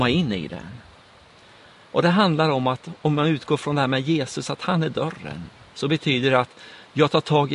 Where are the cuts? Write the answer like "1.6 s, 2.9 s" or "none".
none